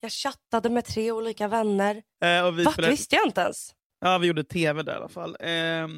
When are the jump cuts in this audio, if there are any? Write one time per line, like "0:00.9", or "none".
0:02.2